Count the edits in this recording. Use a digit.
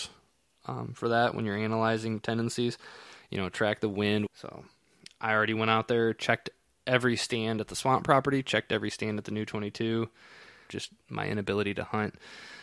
2